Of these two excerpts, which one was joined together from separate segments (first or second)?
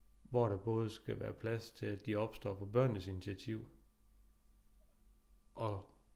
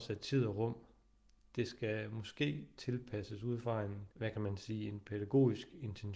second